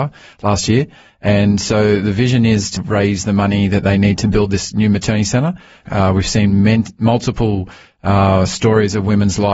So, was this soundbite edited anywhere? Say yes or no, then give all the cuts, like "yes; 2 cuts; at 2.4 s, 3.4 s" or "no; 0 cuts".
yes; 2 cuts; at 2.8 s, 5.9 s